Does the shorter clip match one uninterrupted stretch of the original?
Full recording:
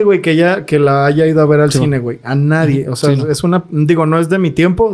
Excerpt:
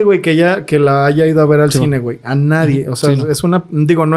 yes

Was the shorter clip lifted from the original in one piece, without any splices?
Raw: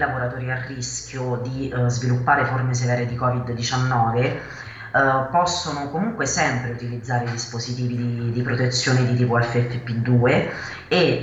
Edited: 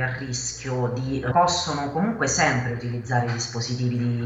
no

